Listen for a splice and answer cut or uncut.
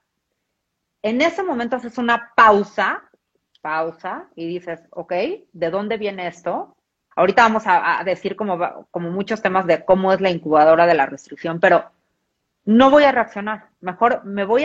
cut